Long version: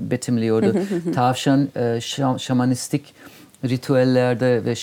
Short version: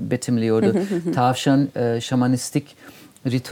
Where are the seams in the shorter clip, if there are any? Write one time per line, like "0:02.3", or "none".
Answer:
0:02.0